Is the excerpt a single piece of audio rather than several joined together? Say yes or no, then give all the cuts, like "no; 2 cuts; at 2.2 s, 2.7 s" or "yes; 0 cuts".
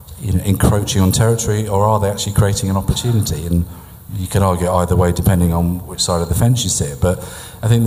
yes; 0 cuts